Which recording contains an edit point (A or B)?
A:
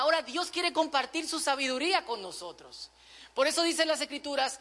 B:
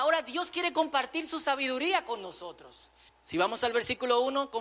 B